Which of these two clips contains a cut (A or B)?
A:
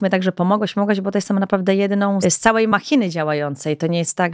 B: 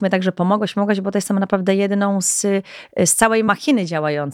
A